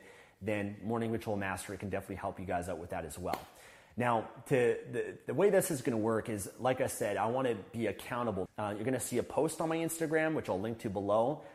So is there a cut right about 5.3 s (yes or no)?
no